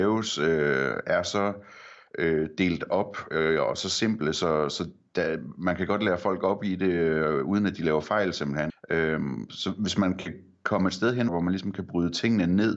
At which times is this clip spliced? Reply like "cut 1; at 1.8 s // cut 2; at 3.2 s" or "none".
cut 1; at 8.7 s // cut 2; at 11.3 s